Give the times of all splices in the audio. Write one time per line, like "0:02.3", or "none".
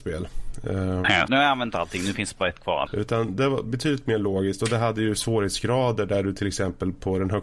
0:01.3
0:02.9